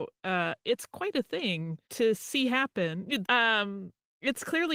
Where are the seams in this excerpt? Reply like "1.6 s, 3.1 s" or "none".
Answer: 1.8 s, 3.2 s